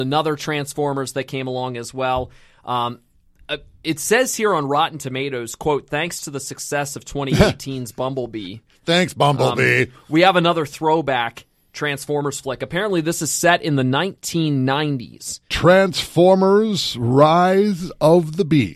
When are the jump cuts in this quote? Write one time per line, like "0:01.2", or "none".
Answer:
0:15.5